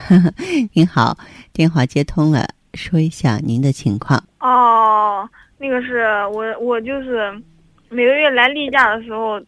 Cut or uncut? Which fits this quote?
uncut